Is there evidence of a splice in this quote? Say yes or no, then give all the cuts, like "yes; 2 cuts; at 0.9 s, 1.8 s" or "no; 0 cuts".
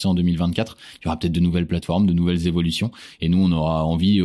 no; 0 cuts